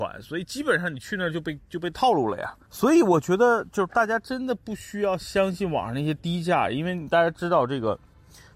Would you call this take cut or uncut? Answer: cut